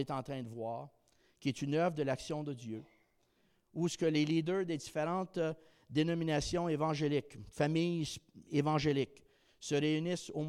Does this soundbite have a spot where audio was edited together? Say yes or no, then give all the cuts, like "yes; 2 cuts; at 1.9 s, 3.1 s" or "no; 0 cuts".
no; 0 cuts